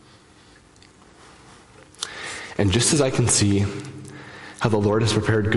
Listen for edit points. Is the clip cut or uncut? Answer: uncut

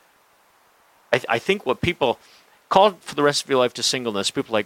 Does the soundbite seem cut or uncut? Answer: uncut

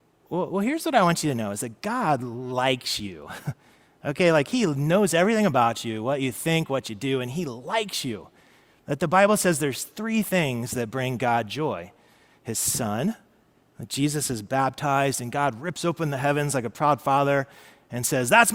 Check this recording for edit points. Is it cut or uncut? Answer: uncut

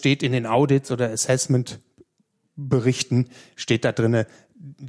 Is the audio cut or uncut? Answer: uncut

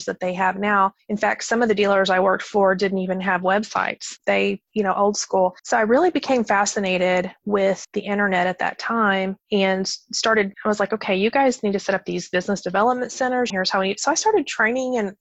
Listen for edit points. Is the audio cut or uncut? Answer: cut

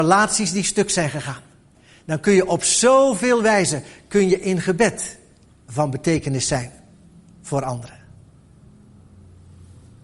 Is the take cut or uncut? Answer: uncut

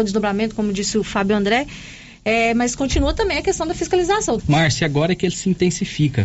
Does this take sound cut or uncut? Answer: cut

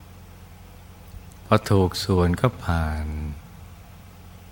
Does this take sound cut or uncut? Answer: uncut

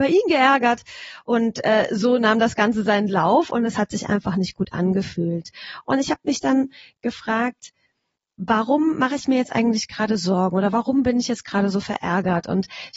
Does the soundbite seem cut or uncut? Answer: uncut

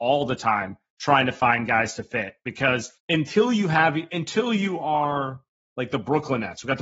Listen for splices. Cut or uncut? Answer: cut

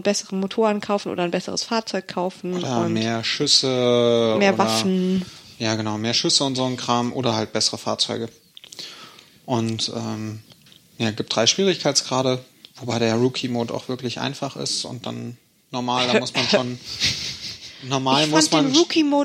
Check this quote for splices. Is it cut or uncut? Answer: uncut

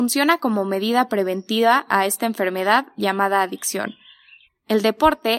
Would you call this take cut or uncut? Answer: cut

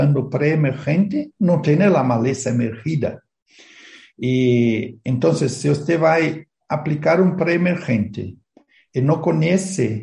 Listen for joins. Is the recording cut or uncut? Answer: uncut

